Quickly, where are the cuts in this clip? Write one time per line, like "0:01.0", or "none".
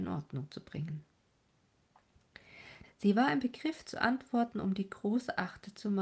0:02.8
0:04.5